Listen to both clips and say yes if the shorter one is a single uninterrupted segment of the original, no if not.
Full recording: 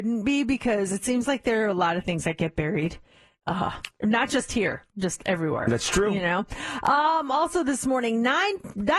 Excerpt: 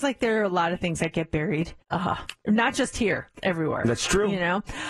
no